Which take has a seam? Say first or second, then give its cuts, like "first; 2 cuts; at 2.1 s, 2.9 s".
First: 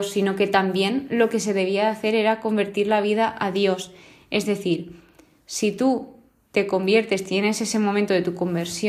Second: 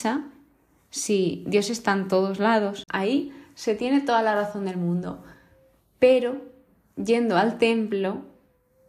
second; 1 cut; at 2.9 s